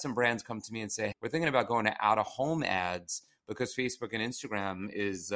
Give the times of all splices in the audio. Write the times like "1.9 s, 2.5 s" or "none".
1.1 s